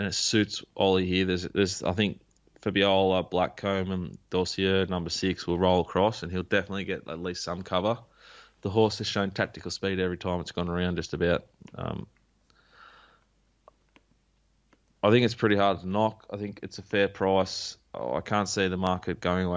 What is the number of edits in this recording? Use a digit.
0